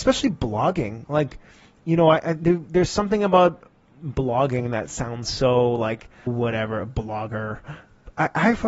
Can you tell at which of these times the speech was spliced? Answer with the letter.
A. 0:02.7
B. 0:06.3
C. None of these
B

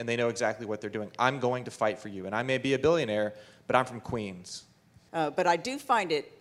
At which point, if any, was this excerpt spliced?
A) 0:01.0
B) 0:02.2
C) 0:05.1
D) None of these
C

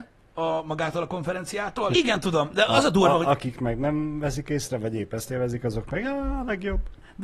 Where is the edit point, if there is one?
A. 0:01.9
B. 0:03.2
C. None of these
A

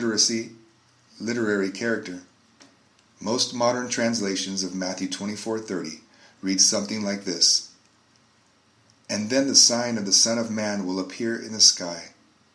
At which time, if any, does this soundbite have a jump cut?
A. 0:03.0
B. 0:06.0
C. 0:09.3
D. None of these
A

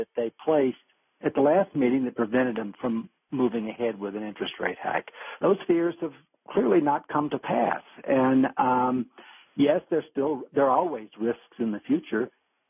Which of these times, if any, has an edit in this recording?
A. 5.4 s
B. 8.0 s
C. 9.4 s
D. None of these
A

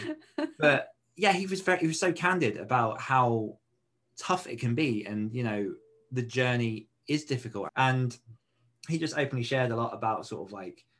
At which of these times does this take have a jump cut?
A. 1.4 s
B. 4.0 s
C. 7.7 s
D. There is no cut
C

